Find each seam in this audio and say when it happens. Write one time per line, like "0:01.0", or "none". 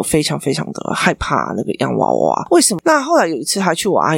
0:02.8